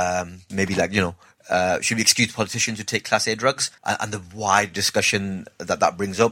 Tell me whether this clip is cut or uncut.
cut